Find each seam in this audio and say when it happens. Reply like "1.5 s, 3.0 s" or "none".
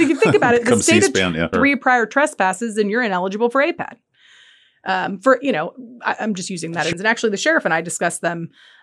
1.5 s, 6.9 s